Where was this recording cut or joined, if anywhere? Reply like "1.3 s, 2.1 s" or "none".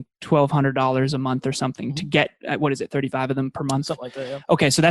none